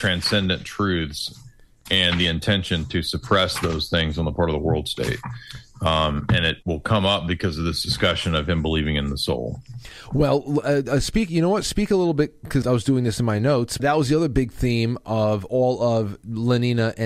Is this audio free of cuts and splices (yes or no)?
no